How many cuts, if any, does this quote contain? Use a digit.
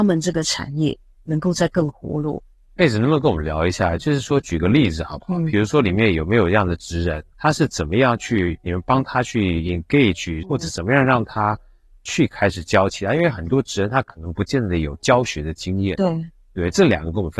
2